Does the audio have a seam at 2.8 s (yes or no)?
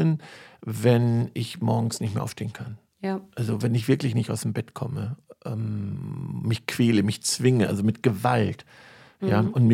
no